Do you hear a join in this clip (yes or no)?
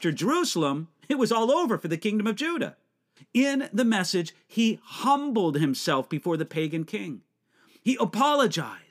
yes